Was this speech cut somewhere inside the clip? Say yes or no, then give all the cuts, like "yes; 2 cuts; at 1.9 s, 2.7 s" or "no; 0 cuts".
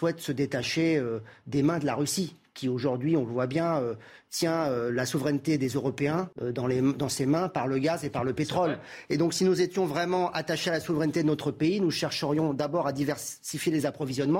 yes; 1 cut; at 6.3 s